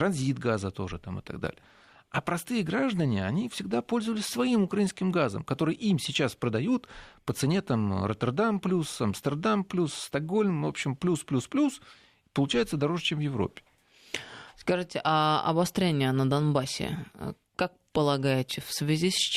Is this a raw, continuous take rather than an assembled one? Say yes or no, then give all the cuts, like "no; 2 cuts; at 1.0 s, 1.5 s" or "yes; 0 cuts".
yes; 0 cuts